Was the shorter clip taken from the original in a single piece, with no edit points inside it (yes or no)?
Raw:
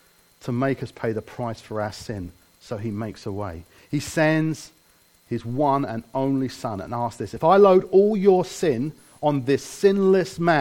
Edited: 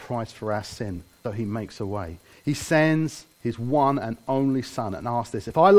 no